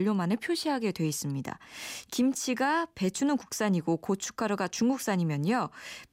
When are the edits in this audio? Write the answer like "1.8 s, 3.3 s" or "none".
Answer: 2.1 s